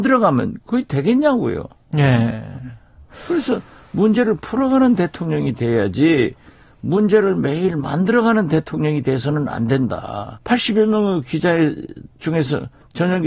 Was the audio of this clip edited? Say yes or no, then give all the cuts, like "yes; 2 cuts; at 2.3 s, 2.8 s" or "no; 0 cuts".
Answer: yes; 1 cut; at 10.3 s